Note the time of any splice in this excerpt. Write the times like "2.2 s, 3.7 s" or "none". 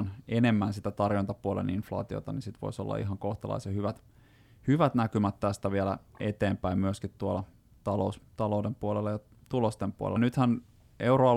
10.2 s

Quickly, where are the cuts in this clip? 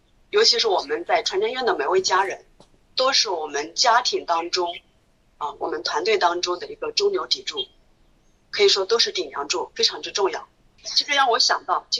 10.8 s

